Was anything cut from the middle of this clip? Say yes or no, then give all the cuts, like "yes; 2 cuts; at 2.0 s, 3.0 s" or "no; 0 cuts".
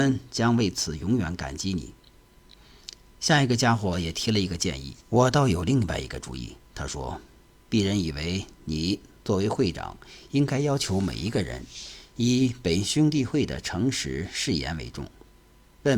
yes; 1 cut; at 5.0 s